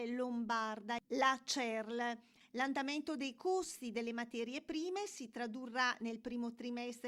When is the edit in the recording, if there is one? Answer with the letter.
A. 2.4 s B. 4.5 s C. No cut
A